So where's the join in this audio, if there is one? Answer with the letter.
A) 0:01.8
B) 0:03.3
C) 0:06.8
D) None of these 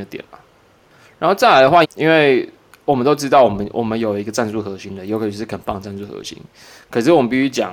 A